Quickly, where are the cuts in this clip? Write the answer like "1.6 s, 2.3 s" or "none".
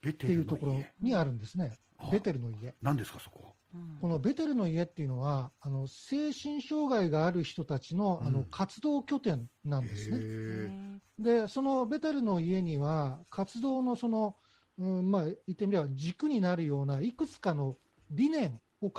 none